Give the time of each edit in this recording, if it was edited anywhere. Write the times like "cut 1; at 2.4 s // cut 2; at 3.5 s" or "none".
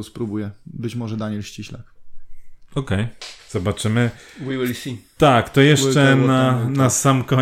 cut 1; at 3.4 s